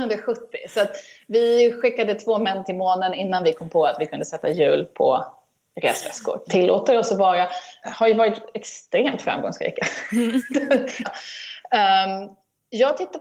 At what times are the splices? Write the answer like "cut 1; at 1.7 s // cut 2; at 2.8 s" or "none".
cut 1; at 6.5 s // cut 2; at 11.0 s

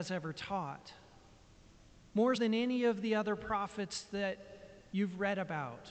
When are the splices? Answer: cut 1; at 2.4 s

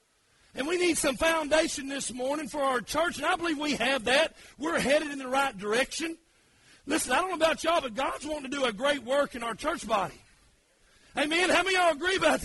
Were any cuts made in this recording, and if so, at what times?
none

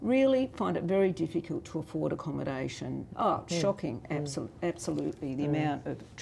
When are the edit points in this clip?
cut 1; at 3.1 s

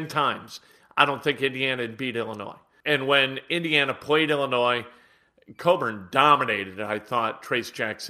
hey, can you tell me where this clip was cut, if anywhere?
cut 1; at 2.8 s

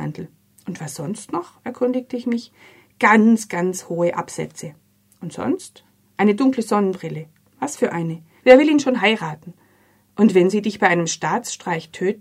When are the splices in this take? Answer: cut 1; at 8.4 s

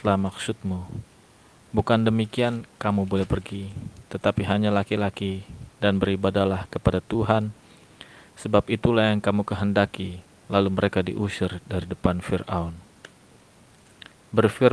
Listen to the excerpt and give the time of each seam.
none

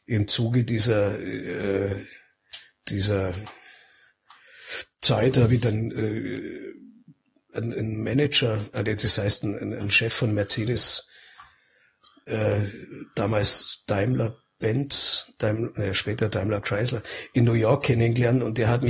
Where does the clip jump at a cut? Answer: none

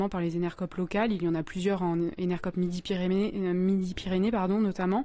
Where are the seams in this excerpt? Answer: none

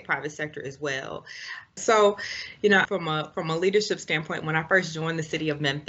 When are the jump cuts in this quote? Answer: cut 1; at 1.8 s // cut 2; at 2.9 s

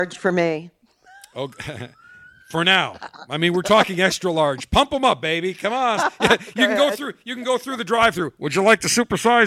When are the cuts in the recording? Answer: cut 1; at 6.0 s

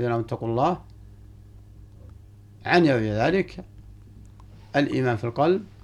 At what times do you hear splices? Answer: none

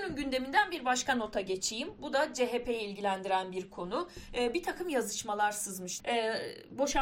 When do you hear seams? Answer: cut 1; at 6.0 s

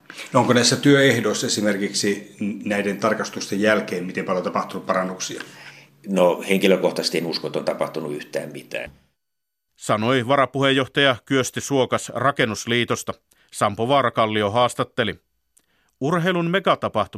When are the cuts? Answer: none

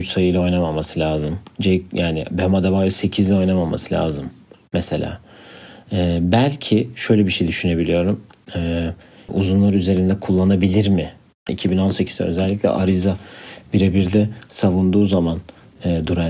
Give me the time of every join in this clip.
cut 1; at 9.3 s // cut 2; at 11.5 s

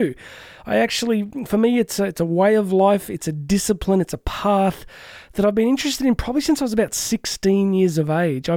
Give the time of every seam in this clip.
none

